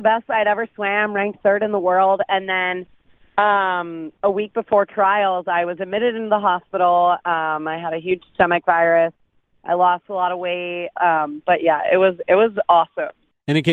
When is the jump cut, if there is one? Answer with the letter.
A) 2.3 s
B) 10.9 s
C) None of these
B